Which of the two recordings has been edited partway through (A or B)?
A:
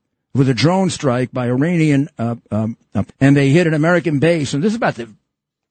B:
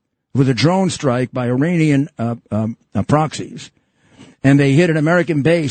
A